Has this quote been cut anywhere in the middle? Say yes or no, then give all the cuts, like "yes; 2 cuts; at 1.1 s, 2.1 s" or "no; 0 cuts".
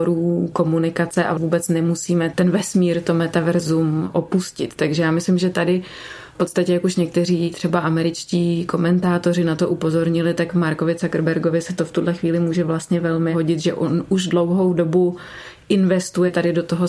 no; 0 cuts